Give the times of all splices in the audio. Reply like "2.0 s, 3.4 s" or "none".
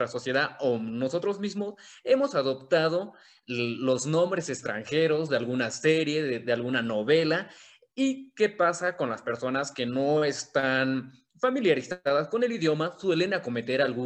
none

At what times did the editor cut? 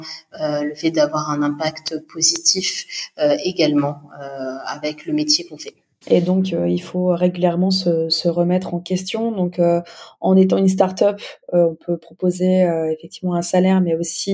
6.0 s

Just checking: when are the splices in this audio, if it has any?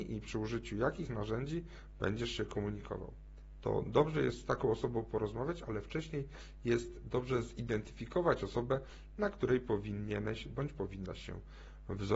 3.6 s

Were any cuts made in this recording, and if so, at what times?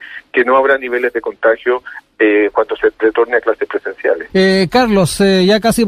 4.3 s

